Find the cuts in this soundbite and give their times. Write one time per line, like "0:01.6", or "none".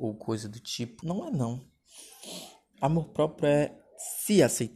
0:01.0